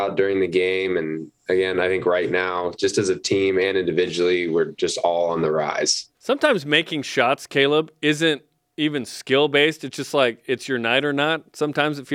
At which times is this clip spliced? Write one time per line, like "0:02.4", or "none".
0:06.1